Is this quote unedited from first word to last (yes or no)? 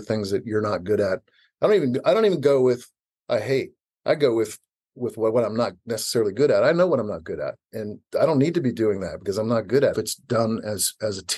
no